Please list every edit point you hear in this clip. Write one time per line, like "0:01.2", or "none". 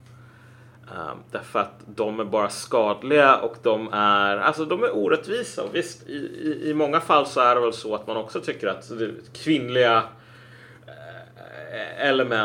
none